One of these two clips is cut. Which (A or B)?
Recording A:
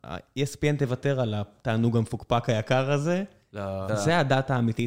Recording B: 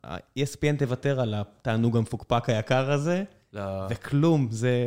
A